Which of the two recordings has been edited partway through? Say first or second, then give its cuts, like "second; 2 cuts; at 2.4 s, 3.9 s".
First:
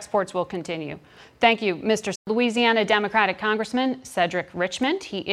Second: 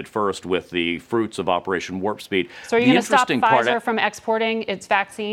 first; 1 cut; at 2.1 s